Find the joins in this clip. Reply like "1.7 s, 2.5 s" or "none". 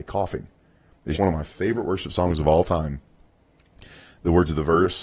1.1 s